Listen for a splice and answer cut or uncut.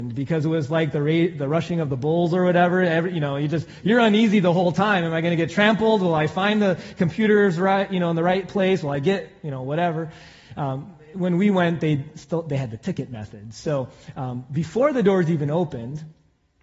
uncut